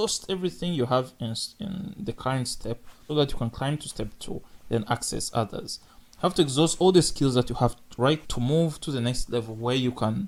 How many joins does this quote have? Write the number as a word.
two